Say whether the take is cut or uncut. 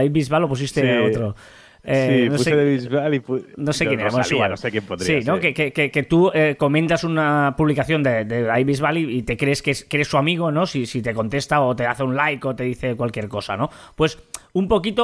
uncut